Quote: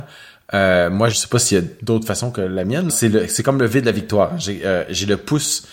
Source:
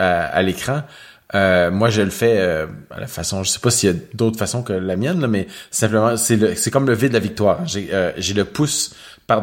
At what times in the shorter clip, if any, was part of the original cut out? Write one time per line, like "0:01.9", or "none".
0:01.1
0:02.9